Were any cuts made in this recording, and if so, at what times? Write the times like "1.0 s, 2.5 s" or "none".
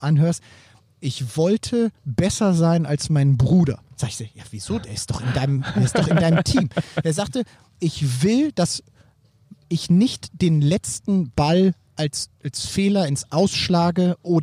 none

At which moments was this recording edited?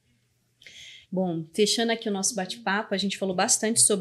none

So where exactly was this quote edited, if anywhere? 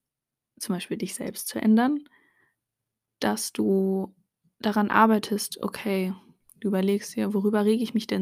none

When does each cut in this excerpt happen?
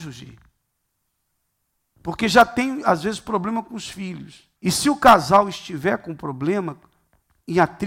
4.6 s

